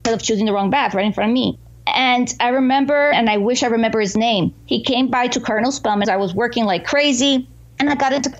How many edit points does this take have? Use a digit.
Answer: 2